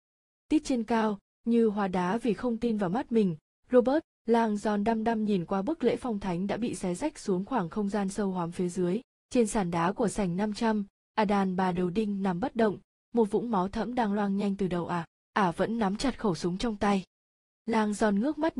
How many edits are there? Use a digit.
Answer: 0